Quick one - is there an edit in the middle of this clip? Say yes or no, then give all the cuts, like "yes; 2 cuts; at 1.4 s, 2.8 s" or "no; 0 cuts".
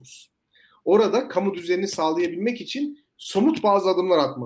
no; 0 cuts